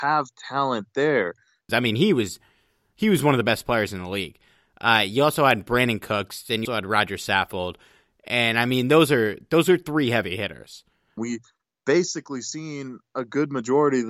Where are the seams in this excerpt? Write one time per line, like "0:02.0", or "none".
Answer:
0:01.7
0:06.7
0:11.2

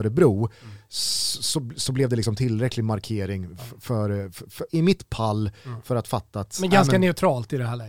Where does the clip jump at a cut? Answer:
0:04.7

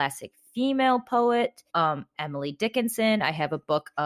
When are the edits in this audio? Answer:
0:01.7

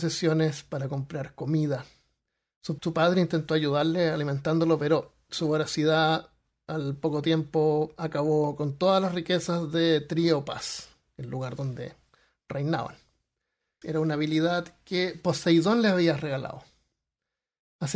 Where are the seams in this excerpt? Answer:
0:02.8
0:13.8

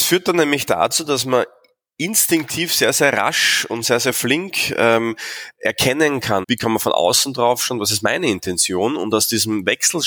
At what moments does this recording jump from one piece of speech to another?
0:06.4

